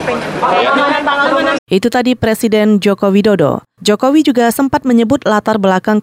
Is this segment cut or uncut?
cut